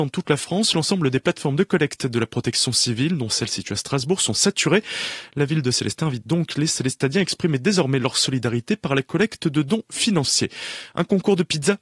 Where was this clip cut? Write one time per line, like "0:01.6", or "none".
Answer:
none